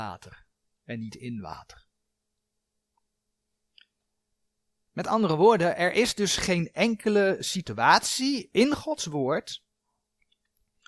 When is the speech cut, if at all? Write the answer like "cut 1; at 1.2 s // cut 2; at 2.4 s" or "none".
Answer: none